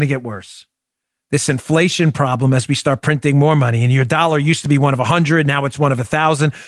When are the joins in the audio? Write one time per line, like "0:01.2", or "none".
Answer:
none